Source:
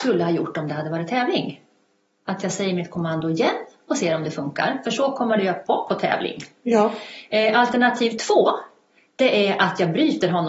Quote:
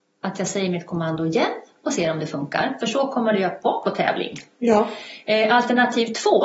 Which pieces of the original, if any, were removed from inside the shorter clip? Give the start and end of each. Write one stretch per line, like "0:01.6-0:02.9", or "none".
none